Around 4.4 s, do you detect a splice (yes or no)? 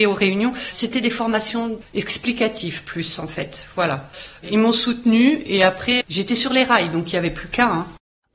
no